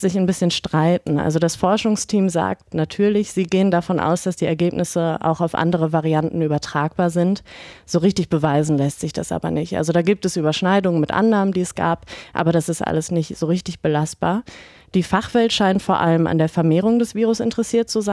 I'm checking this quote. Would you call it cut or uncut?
uncut